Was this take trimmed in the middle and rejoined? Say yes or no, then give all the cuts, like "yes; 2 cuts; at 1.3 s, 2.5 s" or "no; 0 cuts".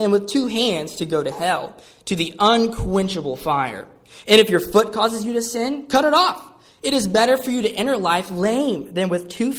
no; 0 cuts